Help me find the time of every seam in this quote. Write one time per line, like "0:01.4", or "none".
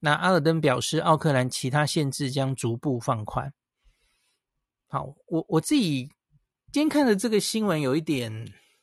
none